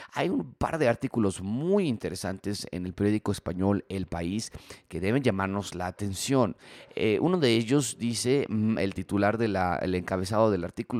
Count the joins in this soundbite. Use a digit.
0